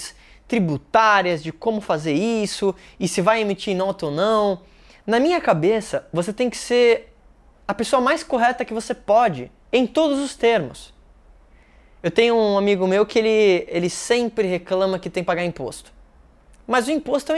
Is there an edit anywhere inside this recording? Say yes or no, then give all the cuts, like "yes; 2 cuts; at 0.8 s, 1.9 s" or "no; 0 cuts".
no; 0 cuts